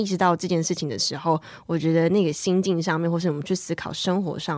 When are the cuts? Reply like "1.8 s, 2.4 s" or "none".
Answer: none